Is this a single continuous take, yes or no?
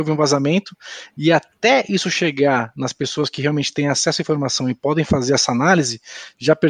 yes